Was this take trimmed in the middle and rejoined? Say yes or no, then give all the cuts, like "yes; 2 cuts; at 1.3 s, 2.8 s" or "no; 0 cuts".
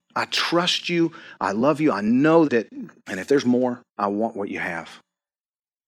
yes; 2 cuts; at 2.4 s, 3.9 s